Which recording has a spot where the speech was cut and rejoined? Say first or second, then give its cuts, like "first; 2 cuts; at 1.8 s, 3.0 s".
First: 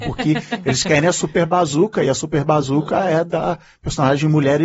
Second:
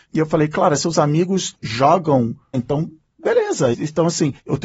second; 2 cuts; at 2.5 s, 3.7 s